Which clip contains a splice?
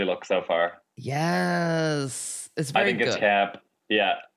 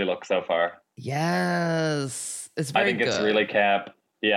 first; 1 cut; at 3.1 s

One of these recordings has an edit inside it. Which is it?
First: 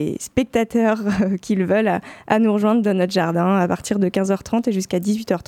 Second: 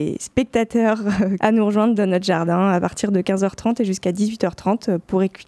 second; 1 cut; at 1.4 s

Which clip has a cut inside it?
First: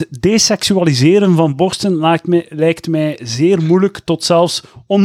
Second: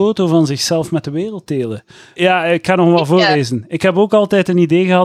second; 1 cut; at 2.2 s

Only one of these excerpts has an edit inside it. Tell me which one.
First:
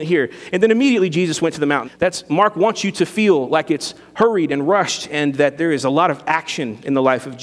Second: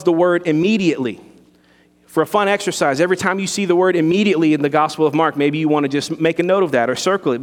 first; 1 cut; at 1.8 s

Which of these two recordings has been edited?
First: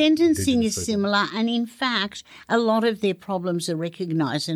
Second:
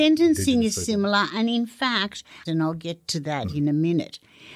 second; 1 cut; at 2.4 s

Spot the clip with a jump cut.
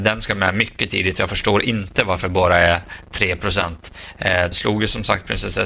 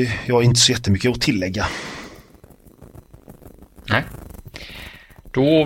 first; 1 cut; at 4.5 s

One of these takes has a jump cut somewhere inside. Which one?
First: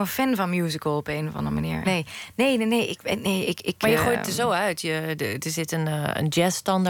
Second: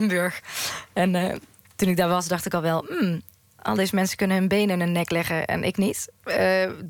first; 1 cut; at 1.8 s

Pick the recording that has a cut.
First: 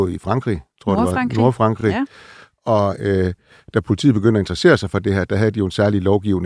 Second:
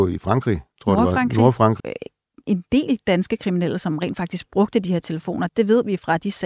second; 2 cuts; at 1.8 s, 5.5 s

